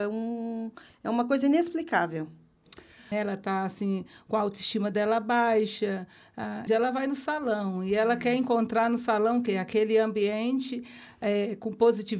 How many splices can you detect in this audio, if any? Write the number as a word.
two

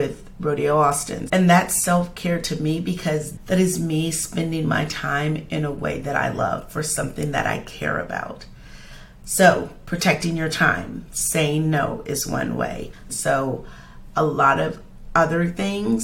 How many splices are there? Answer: two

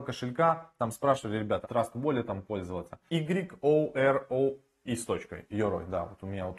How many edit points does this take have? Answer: two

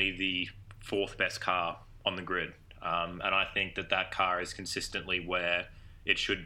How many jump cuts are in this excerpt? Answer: zero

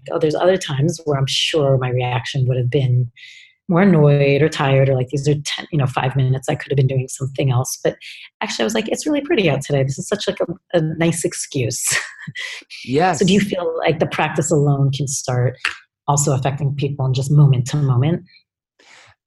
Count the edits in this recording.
zero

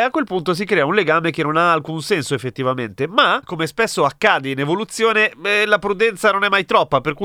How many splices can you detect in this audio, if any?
zero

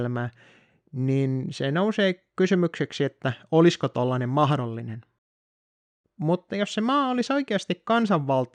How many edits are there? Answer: one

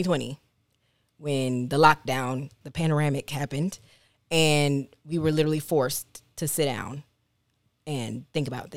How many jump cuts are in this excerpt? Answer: one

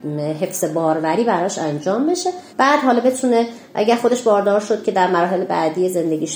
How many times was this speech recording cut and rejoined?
one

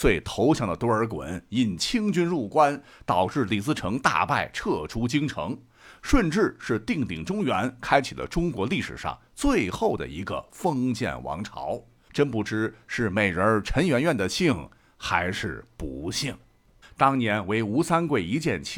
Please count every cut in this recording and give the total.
two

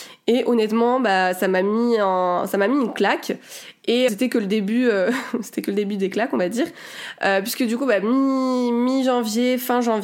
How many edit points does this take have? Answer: one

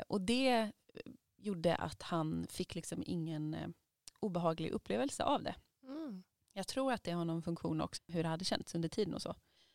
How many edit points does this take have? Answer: one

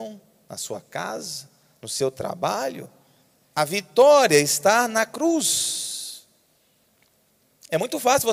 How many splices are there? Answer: one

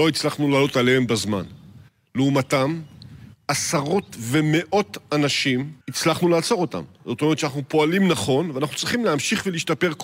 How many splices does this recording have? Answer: one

